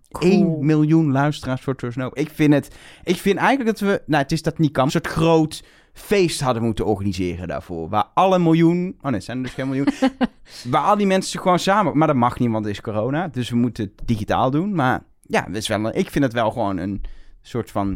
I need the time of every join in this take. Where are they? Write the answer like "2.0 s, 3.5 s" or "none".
4.9 s